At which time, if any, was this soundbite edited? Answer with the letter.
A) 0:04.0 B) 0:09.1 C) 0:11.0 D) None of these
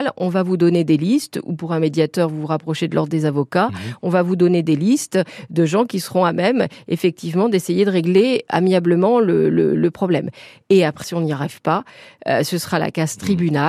C